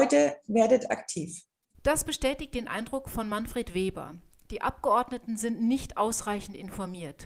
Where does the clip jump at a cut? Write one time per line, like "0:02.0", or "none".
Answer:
0:01.7